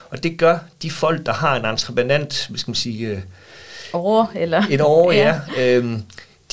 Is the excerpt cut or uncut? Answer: uncut